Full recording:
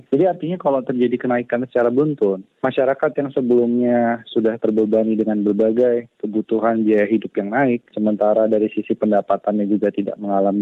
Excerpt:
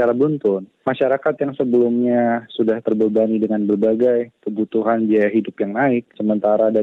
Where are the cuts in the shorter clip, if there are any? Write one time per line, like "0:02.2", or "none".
none

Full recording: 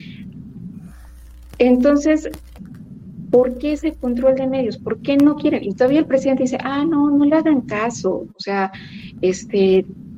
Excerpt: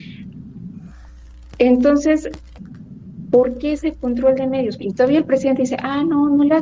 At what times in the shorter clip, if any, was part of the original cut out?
0:04.8

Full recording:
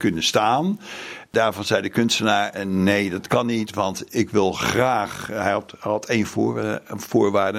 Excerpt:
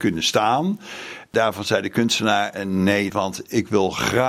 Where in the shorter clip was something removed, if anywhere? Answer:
0:03.1

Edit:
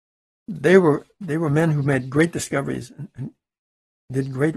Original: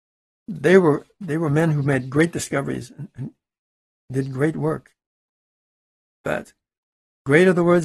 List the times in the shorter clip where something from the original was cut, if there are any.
none

